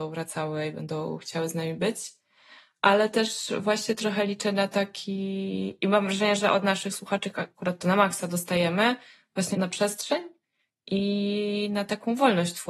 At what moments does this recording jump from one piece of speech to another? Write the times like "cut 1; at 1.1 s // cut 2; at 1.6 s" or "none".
cut 1; at 9.5 s